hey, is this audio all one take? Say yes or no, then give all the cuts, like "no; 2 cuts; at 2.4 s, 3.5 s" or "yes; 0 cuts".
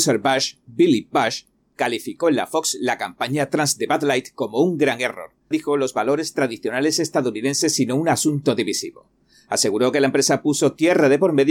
no; 1 cut; at 5.5 s